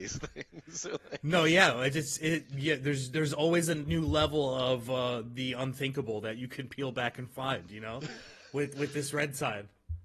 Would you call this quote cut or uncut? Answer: uncut